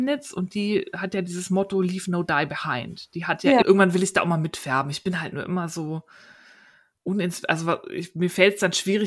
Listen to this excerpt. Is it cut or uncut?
cut